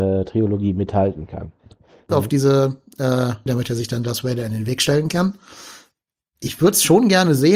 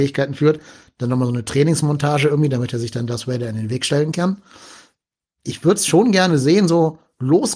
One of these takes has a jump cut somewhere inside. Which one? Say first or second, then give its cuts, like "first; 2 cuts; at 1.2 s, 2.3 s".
first; 2 cuts; at 2.1 s, 3.5 s